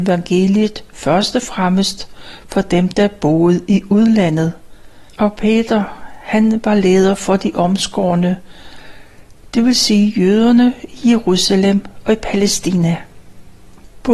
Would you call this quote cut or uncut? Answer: cut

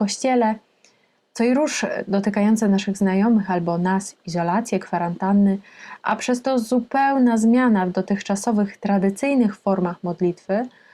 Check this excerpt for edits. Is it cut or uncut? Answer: uncut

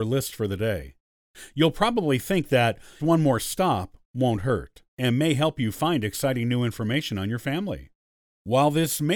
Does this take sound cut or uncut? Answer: cut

